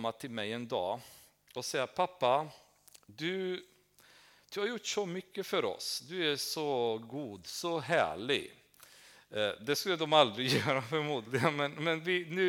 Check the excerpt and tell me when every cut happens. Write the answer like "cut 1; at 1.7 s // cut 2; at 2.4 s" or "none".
none